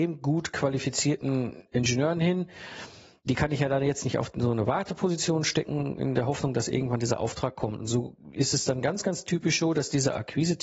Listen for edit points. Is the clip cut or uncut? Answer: uncut